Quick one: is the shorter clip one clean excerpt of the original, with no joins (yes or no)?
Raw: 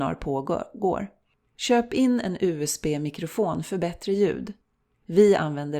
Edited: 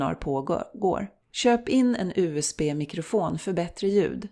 no